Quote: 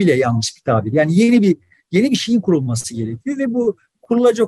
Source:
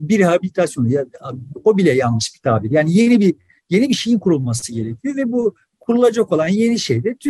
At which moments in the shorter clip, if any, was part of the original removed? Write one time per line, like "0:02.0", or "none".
none